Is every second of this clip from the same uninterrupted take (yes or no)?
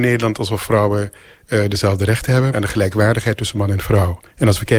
no